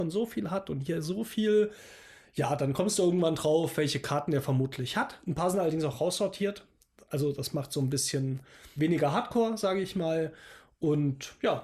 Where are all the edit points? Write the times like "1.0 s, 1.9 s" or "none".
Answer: 8.8 s